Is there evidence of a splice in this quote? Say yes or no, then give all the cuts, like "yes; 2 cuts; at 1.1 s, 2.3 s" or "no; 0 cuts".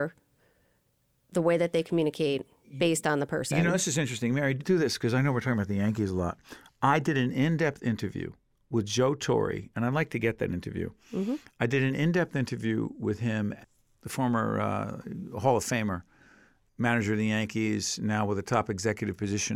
no; 0 cuts